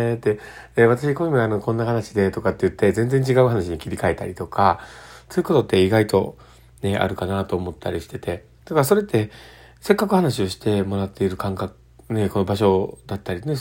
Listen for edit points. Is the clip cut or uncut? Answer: cut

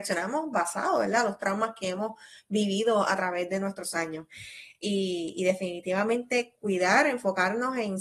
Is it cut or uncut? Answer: uncut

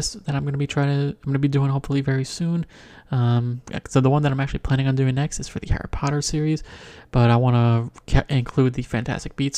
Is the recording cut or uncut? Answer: uncut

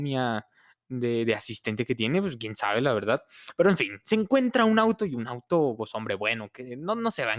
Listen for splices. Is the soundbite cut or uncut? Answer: uncut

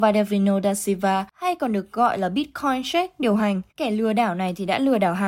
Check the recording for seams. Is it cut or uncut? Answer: cut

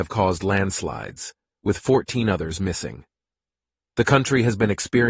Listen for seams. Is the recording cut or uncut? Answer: cut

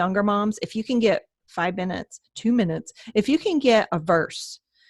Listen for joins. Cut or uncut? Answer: uncut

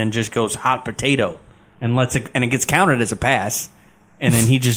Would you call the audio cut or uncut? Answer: uncut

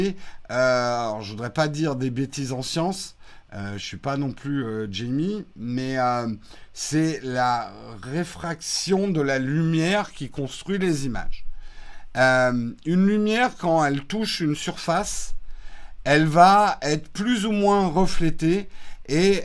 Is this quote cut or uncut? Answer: uncut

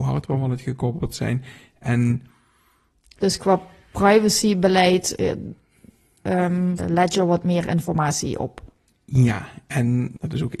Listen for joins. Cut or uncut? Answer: cut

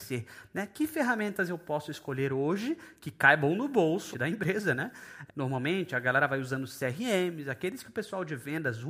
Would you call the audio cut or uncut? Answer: cut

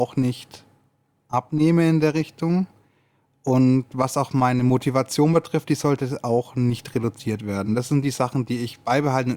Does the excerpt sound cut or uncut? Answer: uncut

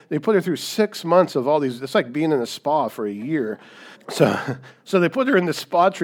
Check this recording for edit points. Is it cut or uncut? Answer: cut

